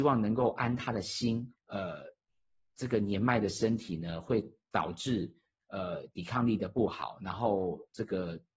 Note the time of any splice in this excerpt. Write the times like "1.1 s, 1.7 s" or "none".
1.5 s